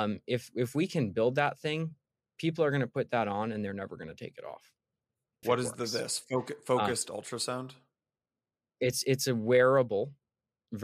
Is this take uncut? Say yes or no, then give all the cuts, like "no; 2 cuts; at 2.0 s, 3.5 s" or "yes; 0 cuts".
no; 1 cut; at 5.4 s